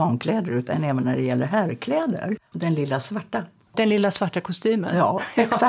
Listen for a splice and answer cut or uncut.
cut